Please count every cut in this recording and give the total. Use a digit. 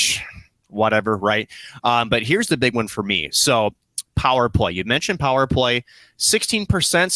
0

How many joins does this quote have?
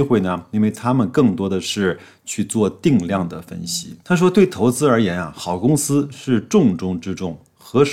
0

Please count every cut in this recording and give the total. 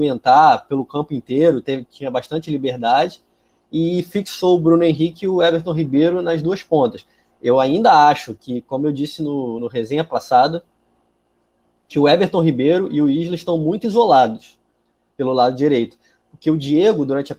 0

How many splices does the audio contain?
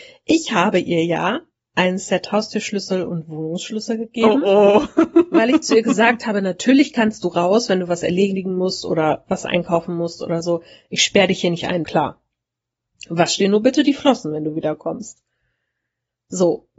1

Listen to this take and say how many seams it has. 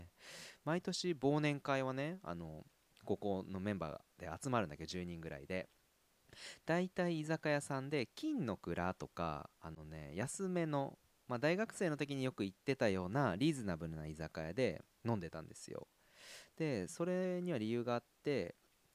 1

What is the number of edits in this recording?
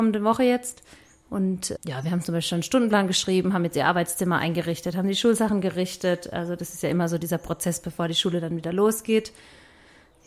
1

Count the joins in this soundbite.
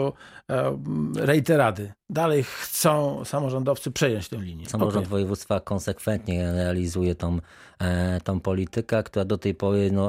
1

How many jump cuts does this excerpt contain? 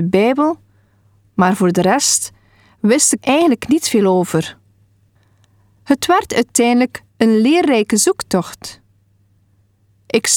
1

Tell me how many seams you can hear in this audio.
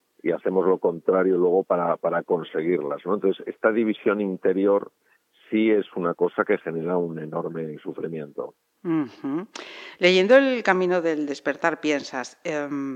0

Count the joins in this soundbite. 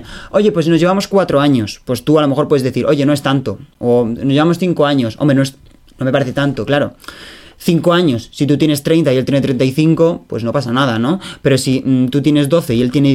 0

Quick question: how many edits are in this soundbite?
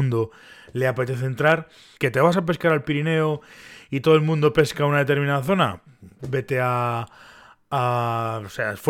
2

